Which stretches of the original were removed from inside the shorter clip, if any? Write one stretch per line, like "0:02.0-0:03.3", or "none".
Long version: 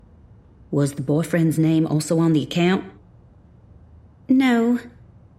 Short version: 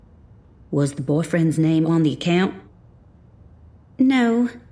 0:01.9-0:02.2